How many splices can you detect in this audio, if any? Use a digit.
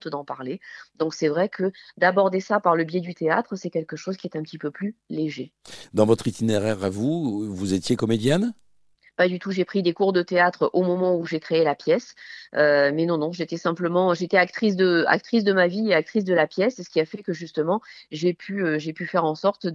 0